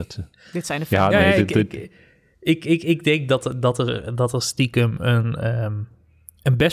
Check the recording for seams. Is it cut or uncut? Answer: uncut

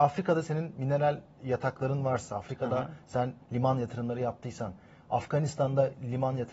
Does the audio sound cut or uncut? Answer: uncut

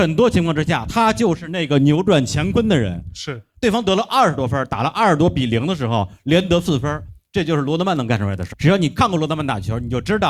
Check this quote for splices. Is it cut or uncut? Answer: cut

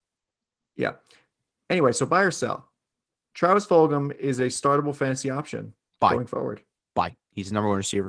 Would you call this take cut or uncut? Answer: uncut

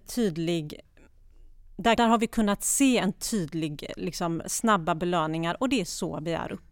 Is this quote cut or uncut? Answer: cut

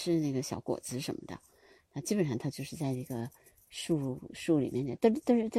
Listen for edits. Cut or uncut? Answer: uncut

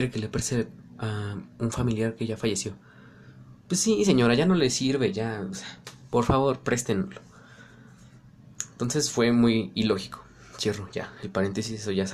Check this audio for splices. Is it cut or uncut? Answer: uncut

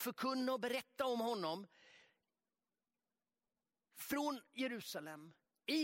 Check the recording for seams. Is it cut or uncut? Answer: uncut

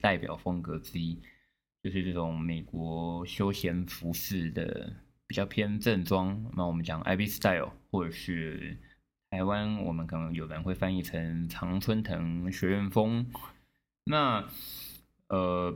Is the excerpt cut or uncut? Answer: uncut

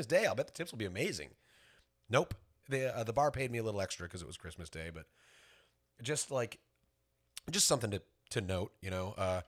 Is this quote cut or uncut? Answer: cut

